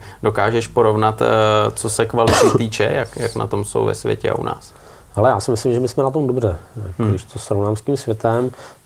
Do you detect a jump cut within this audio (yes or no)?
no